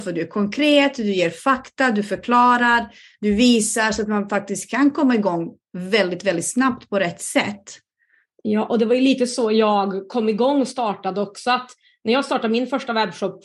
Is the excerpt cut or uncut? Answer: uncut